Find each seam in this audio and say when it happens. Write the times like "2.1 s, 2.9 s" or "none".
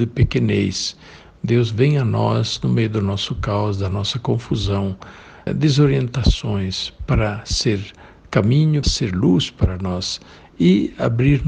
5.5 s, 8.8 s